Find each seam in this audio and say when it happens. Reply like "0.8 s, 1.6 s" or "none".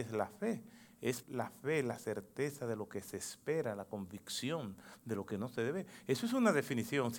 1.2 s